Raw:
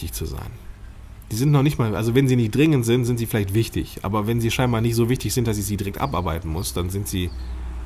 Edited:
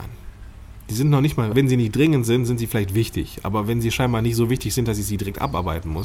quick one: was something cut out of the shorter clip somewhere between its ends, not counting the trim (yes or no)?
yes